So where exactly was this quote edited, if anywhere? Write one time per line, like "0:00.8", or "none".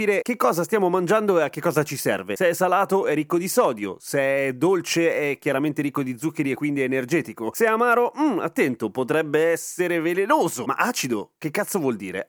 none